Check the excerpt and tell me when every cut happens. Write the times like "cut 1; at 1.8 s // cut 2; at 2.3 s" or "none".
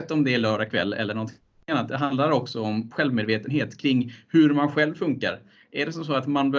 cut 1; at 2.9 s